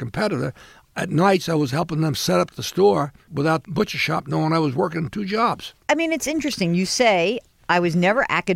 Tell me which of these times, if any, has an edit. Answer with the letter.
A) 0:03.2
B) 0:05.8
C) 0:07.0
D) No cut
A